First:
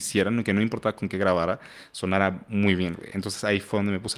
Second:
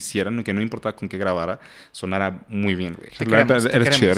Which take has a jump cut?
second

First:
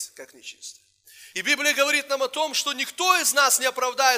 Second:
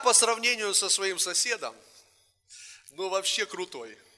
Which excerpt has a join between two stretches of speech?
first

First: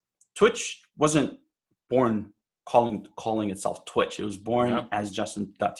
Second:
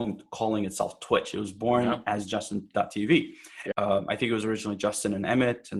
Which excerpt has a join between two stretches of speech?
second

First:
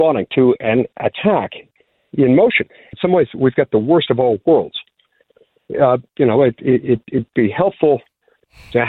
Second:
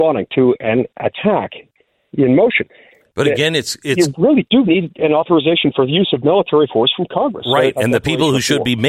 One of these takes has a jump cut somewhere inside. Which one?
first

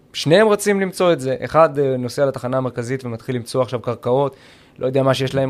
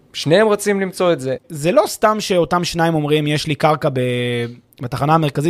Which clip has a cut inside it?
second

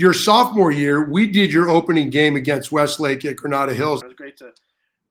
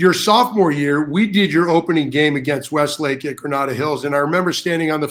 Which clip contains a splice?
first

